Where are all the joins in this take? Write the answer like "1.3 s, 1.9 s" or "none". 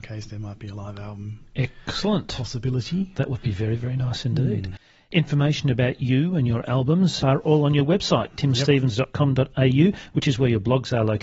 7.2 s